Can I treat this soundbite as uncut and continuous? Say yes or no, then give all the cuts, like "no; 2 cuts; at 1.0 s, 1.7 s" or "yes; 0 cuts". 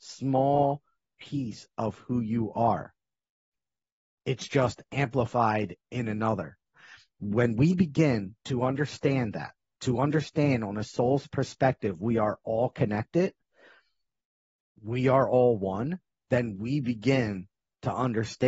yes; 0 cuts